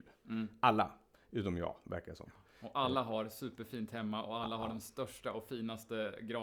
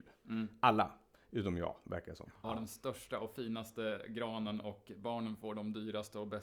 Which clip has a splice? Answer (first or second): second